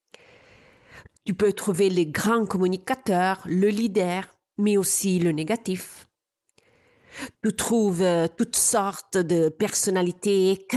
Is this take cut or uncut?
cut